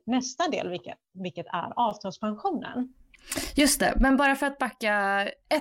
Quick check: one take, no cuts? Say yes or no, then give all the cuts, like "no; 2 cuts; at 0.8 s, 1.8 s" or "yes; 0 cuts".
yes; 0 cuts